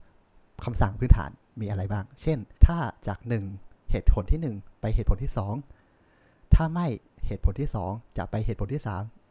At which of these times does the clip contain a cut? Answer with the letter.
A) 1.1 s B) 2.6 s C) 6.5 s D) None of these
B